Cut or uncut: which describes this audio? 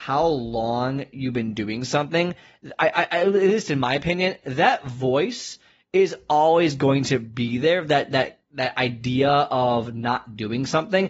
uncut